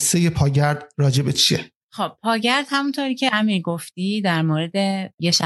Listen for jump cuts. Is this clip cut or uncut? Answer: cut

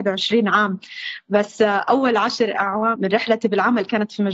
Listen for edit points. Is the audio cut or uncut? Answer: cut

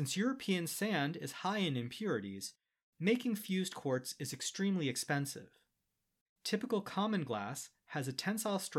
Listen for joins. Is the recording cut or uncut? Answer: cut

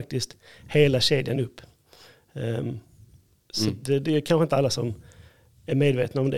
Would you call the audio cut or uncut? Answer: uncut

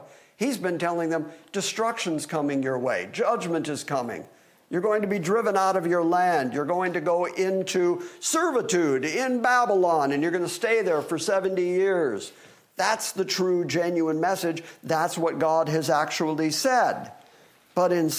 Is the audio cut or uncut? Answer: uncut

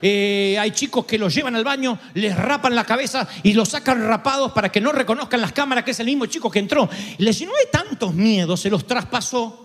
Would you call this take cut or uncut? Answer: uncut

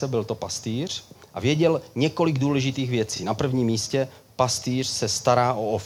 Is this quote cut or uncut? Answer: uncut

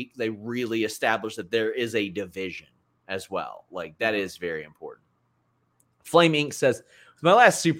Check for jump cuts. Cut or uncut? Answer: uncut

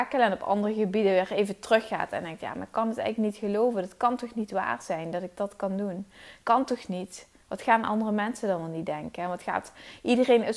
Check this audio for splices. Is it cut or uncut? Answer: uncut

